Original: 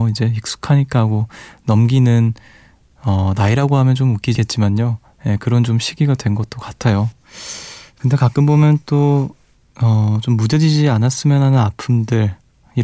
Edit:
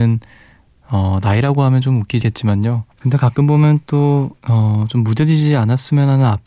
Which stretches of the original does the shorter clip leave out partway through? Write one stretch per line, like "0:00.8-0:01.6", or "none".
0:05.1-0:07.9
0:09.4-0:09.7